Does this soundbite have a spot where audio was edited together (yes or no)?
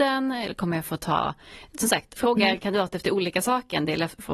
yes